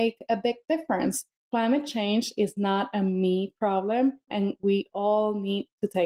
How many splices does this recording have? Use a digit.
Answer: 2